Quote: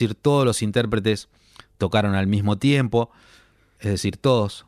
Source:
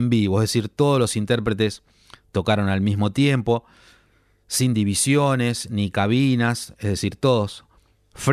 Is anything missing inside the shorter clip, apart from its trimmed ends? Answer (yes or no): yes